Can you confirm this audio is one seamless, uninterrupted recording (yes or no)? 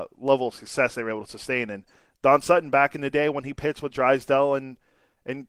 yes